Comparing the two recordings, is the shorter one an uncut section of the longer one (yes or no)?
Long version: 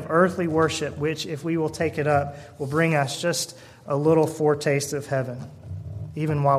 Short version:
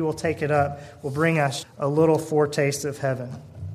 no